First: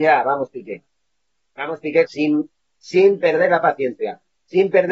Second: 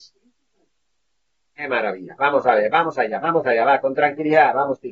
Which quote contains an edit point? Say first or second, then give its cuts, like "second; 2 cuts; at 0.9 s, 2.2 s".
first; 1 cut; at 2.1 s